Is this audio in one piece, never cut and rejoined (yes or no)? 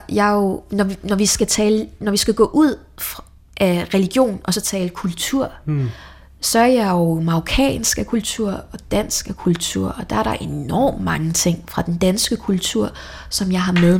yes